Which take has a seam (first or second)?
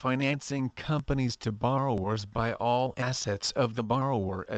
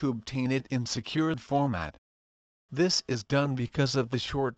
second